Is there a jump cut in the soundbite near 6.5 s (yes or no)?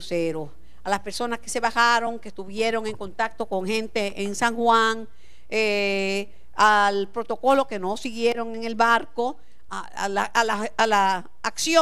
no